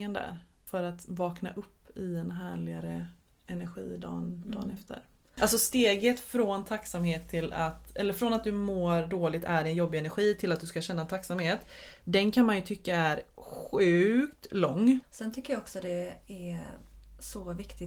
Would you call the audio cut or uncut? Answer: cut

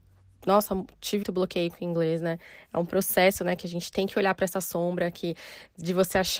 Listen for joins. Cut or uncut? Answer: cut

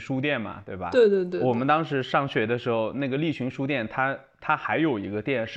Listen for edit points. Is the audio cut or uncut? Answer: uncut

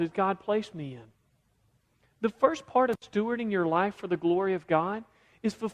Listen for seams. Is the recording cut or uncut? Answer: uncut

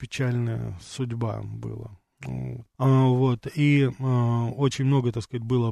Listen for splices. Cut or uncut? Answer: cut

